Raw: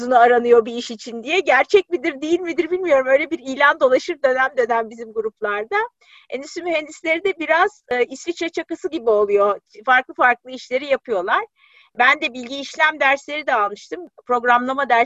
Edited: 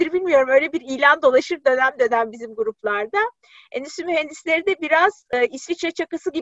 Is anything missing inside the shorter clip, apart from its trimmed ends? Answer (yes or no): no